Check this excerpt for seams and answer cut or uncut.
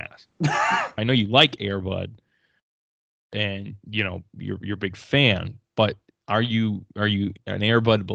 cut